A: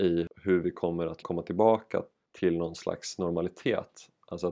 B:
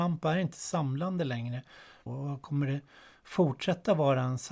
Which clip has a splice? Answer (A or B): B